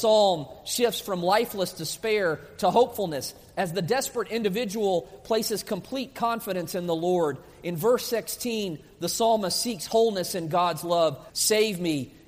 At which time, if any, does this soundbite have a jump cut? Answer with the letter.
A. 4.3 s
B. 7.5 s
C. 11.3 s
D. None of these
C